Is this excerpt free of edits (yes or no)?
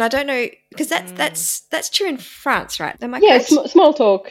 no